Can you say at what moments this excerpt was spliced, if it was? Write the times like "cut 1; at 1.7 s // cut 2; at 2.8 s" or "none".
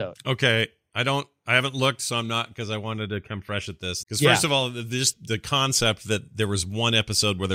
cut 1; at 4.0 s // cut 2; at 5.1 s

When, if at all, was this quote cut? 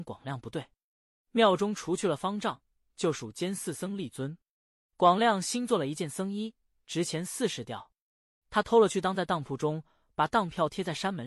none

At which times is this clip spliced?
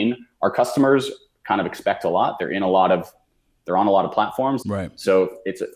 cut 1; at 4.6 s

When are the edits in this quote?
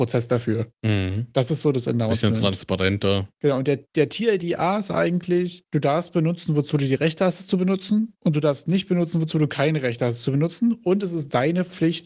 none

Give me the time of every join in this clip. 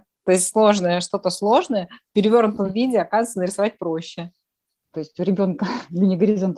cut 1; at 4.8 s

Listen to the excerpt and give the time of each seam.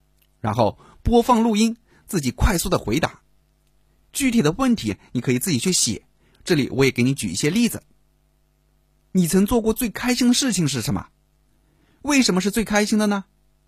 none

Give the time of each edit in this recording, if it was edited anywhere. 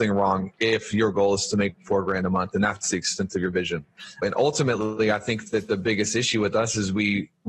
cut 1; at 4.2 s

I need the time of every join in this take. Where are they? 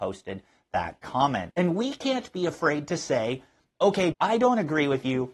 cut 1; at 1.5 s // cut 2; at 4.1 s

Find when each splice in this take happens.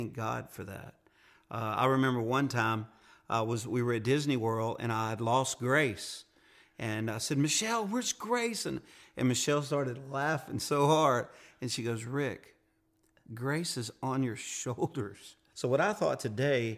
cut 1; at 15.5 s

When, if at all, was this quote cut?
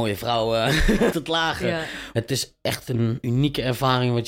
cut 1; at 1.1 s

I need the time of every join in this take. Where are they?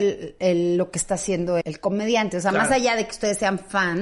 cut 1; at 1.6 s

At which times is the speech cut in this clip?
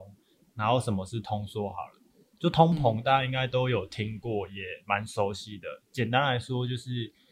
none

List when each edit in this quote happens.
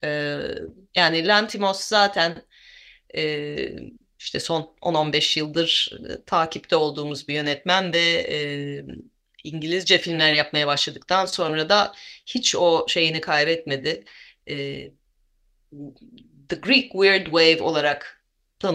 none

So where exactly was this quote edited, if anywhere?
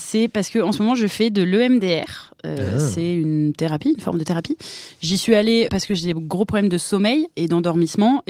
cut 1; at 5.7 s

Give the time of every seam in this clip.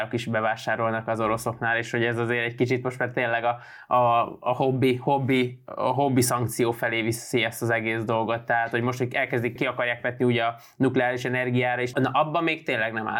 cut 1; at 9.6 s // cut 2; at 11.9 s

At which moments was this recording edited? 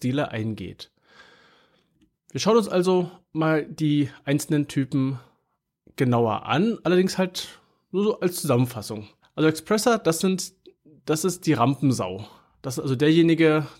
cut 1; at 9.2 s

